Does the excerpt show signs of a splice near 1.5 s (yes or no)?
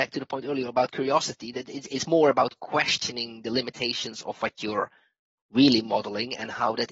no